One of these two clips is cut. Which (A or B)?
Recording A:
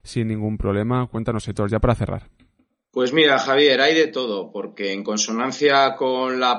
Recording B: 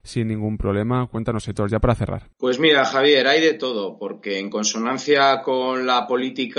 B